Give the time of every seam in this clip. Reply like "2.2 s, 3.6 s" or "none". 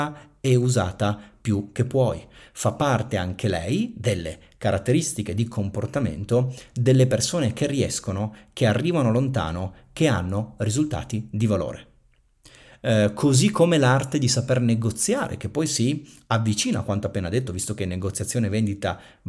none

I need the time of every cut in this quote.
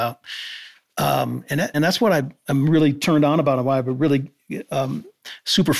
1.7 s

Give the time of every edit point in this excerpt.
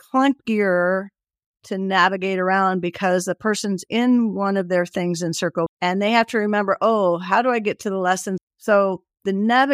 5.7 s, 8.4 s

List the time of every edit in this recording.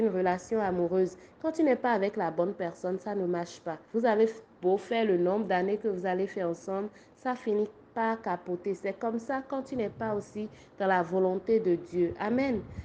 3.8 s

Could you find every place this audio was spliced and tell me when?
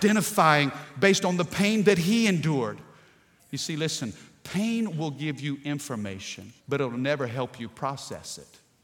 3.4 s, 6.6 s

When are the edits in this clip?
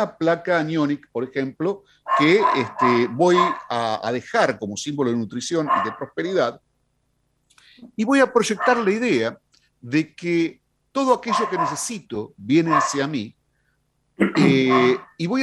none

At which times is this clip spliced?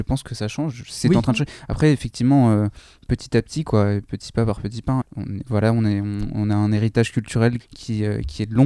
5.0 s, 7.6 s

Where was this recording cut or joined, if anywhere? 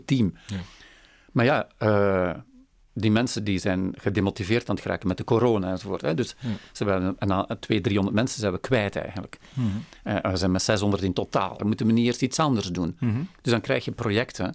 10.2 s, 11.6 s

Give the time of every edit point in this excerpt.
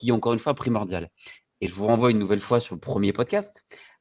none

